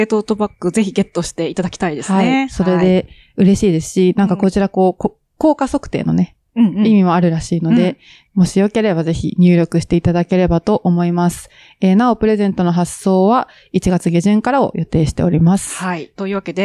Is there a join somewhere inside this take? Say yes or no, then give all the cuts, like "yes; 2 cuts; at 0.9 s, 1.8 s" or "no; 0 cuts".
yes; 1 cut; at 8.3 s